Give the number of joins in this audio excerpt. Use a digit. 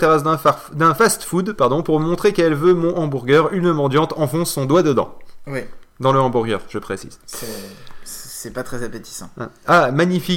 0